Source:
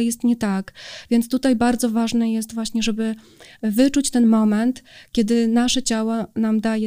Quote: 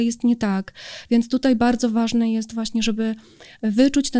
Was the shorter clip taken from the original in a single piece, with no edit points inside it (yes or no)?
yes